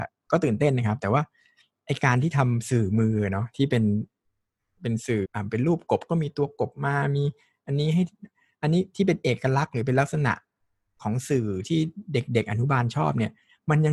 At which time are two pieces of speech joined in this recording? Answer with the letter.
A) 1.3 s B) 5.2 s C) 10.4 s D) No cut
B